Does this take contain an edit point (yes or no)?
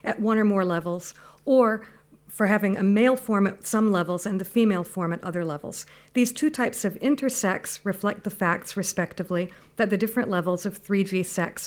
no